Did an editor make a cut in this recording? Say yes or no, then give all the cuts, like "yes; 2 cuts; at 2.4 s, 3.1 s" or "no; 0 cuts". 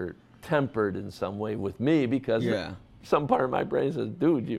no; 0 cuts